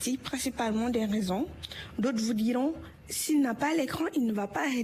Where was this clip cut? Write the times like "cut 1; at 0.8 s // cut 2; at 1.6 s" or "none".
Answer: none